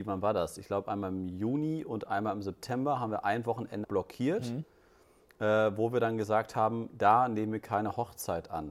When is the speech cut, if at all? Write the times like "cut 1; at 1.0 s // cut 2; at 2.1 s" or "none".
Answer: cut 1; at 3.8 s